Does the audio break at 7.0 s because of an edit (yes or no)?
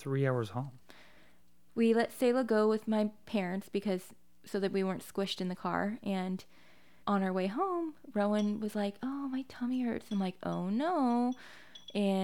yes